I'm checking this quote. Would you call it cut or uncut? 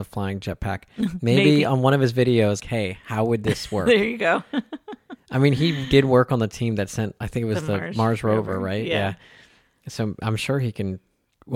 cut